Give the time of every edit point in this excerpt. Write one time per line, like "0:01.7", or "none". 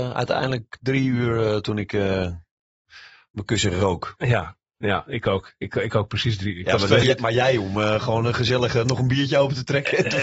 0:07.0